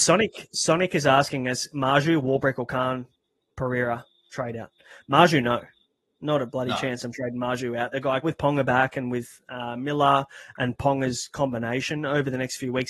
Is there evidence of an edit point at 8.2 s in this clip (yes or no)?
yes